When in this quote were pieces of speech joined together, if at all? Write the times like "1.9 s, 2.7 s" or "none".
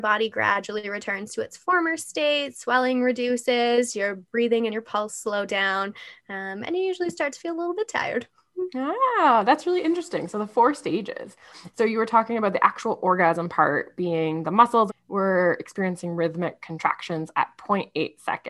11.7 s, 14.9 s